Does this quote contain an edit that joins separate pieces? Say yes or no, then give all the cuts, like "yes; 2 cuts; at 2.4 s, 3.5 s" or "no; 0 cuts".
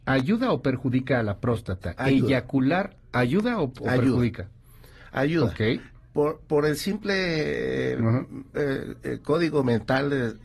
no; 0 cuts